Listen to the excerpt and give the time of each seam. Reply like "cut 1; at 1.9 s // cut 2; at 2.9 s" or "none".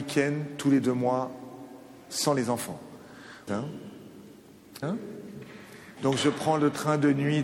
cut 1; at 3.5 s // cut 2; at 4.8 s // cut 3; at 6.0 s